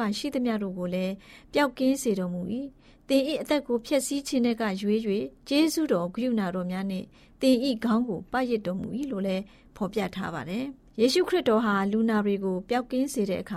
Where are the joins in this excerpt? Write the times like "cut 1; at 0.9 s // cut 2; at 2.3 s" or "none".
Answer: cut 1; at 5.4 s